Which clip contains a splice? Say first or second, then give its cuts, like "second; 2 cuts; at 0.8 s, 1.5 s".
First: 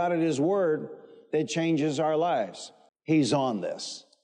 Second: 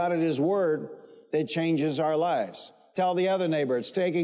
first; 1 cut; at 2.9 s